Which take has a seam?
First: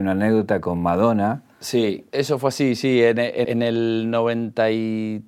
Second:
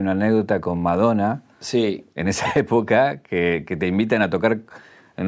first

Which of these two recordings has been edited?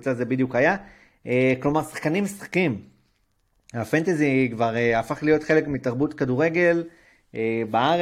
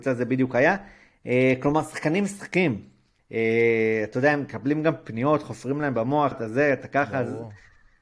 second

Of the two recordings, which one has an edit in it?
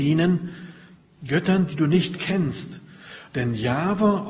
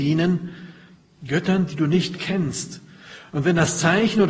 first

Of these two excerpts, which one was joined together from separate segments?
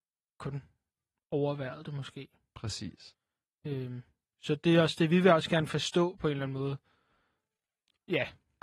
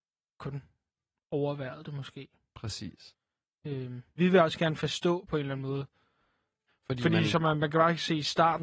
second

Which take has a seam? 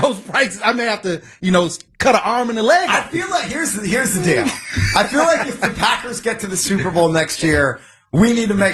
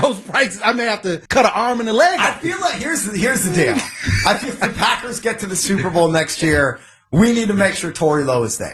second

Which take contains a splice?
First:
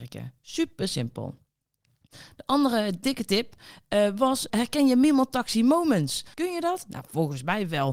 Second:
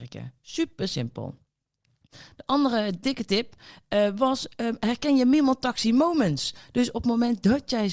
first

